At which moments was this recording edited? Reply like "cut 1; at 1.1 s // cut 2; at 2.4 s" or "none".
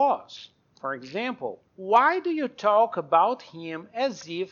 cut 1; at 1.7 s